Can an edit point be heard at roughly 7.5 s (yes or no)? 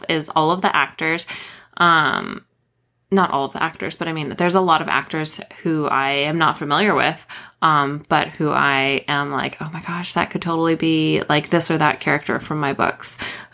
no